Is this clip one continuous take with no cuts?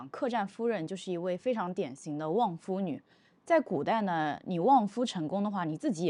yes; 0 cuts

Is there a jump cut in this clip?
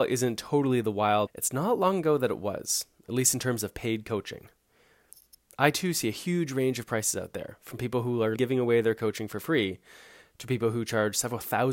yes; 2 cuts; at 1.3 s, 8.4 s

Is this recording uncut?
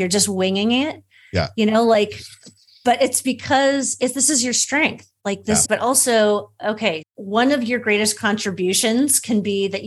no; 2 cuts; at 5.6 s, 7.0 s

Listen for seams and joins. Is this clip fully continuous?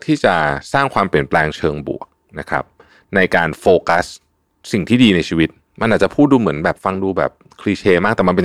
yes; 0 cuts

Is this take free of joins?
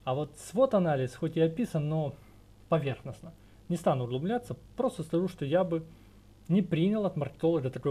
yes; 0 cuts

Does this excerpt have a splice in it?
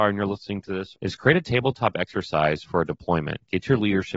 yes; 1 cut; at 0.9 s

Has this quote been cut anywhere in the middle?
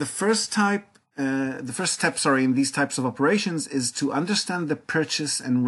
no; 0 cuts

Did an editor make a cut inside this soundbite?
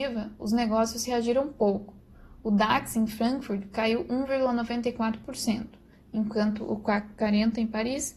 no; 0 cuts

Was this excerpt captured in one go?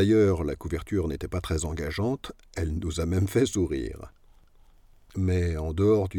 no; 1 cut; at 5.0 s

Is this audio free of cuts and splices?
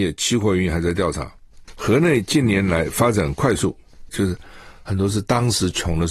no; 2 cuts; at 1.6 s, 4.1 s

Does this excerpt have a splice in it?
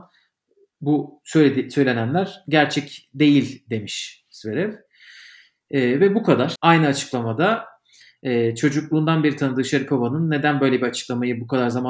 yes; 1 cut; at 6.6 s

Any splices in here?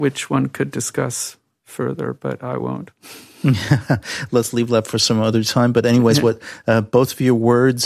no; 0 cuts

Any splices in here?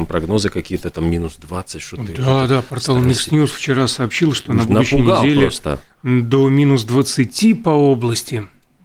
no; 0 cuts

